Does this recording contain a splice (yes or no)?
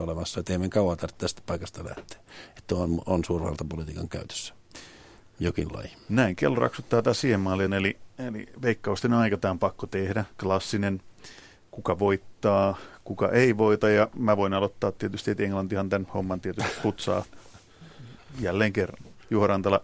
yes